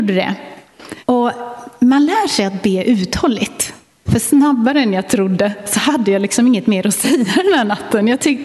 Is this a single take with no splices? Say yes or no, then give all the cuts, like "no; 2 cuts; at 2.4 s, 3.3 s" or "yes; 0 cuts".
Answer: no; 2 cuts; at 1.0 s, 4.1 s